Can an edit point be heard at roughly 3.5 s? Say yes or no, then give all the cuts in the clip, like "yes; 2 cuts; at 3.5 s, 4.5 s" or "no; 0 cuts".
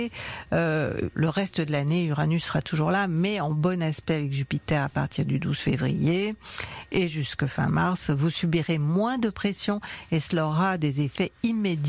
no; 1 cut; at 1.1 s